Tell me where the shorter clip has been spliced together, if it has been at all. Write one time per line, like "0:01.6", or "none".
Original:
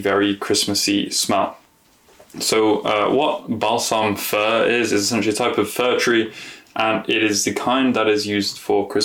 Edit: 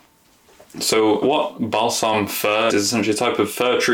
0:01.2
0:02.7